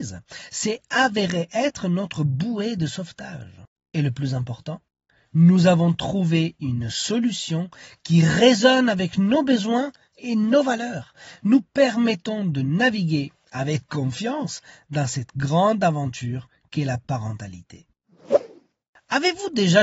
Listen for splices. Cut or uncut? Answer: cut